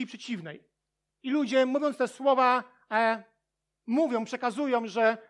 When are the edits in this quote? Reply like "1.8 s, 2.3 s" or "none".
1.1 s